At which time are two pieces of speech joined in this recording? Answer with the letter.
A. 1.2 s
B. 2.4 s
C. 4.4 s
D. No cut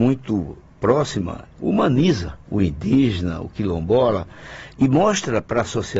B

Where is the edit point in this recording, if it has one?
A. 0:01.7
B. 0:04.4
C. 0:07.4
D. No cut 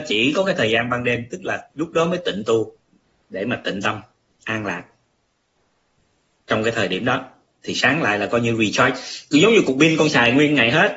A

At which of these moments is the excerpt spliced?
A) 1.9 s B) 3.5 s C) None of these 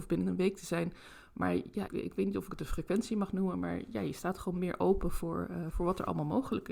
A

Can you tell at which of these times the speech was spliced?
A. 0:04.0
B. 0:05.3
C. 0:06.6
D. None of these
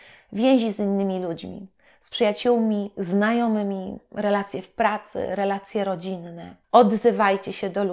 C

